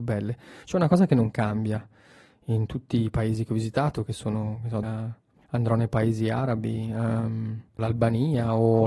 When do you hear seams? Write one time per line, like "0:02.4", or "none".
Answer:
0:04.8
0:07.8